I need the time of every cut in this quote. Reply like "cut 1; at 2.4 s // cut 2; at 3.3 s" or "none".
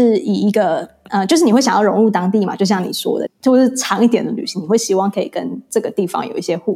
cut 1; at 3.3 s